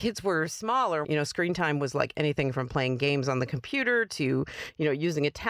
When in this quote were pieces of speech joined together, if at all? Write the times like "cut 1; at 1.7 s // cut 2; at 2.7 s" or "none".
cut 1; at 1.0 s